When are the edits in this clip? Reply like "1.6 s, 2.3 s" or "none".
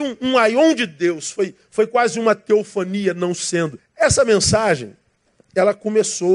3.8 s